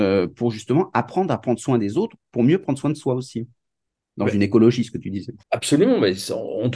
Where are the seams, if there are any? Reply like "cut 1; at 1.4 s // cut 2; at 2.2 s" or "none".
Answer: cut 1; at 5.4 s

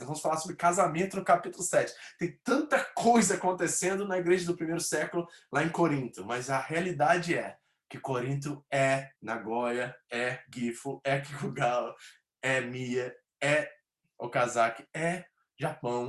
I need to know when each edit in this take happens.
cut 1; at 9.2 s

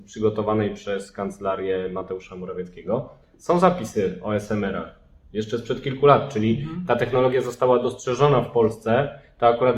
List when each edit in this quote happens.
none

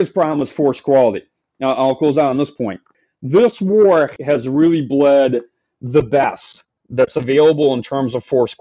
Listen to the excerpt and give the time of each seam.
none

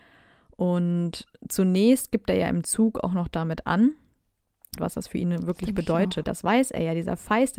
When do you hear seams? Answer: cut 1; at 4.8 s // cut 2; at 6.2 s

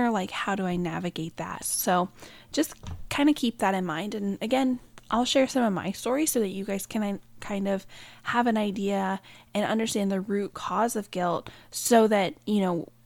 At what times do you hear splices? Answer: cut 1; at 1.6 s

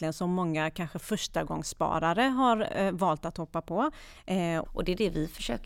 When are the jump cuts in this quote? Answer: cut 1; at 4.6 s

